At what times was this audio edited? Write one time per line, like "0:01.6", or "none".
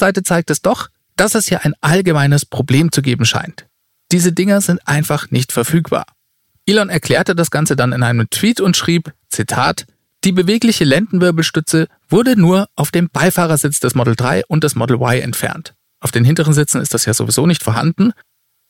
none